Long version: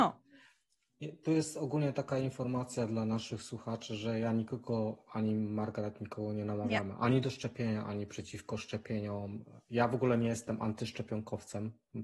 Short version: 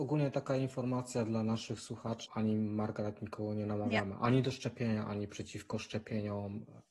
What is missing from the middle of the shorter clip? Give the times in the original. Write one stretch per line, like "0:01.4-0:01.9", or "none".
0:03.9-0:05.0